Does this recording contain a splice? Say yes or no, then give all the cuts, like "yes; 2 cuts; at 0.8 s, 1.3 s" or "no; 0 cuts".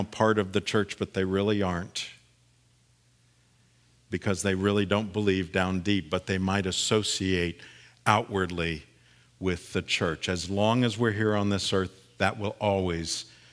no; 0 cuts